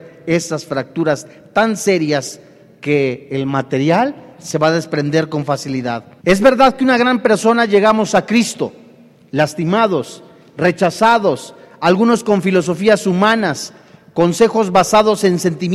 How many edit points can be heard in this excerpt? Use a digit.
1